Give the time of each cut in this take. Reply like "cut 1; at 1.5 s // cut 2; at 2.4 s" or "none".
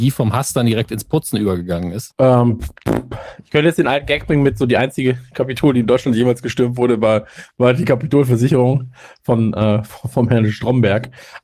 cut 1; at 2.1 s